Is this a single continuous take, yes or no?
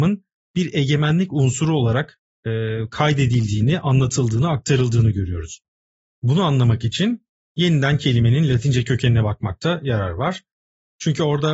no